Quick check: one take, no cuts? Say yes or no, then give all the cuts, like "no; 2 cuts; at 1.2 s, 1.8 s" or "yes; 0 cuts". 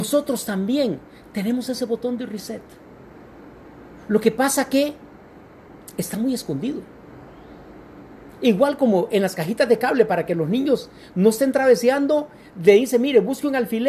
yes; 0 cuts